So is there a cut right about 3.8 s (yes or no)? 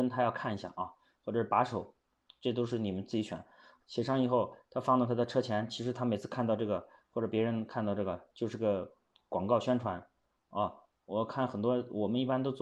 yes